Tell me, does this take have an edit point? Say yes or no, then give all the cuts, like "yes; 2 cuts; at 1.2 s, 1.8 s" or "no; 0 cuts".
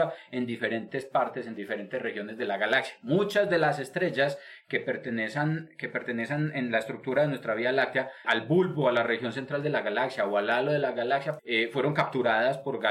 yes; 2 cuts; at 8.2 s, 11.4 s